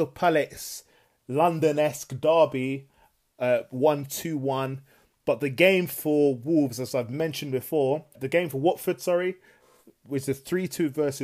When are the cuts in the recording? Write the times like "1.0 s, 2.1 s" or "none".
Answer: 8.1 s